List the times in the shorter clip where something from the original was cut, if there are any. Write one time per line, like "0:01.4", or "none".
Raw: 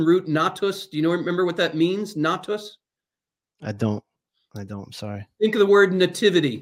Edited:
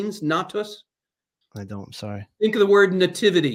0:01.4